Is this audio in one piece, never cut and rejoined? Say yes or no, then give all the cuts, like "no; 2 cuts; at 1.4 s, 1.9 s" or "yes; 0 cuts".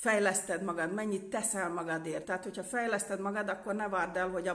no; 1 cut; at 2.2 s